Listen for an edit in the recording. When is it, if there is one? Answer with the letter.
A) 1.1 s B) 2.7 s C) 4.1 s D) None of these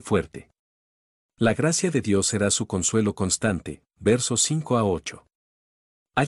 D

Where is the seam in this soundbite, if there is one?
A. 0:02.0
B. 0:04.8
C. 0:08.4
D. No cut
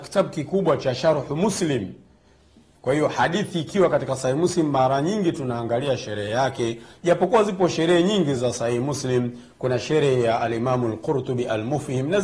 C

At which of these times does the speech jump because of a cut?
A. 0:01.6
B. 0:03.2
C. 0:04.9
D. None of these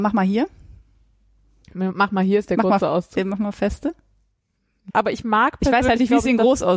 C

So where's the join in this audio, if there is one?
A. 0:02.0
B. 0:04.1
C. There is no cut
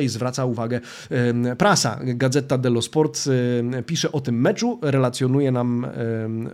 C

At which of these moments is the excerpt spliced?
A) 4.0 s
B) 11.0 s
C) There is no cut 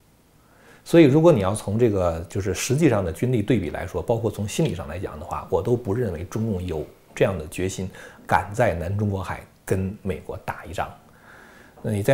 C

